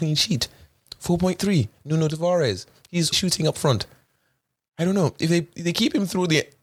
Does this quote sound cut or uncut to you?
cut